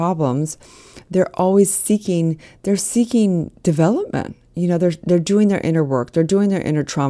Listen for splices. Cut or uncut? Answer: uncut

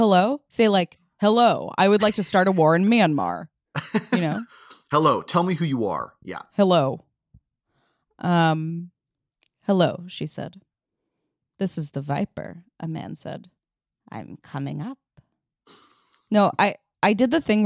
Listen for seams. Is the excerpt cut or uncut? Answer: uncut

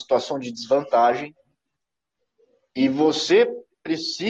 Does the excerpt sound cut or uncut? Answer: uncut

